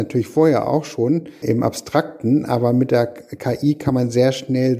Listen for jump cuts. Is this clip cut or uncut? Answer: uncut